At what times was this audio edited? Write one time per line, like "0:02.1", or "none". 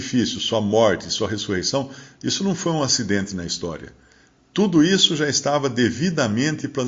none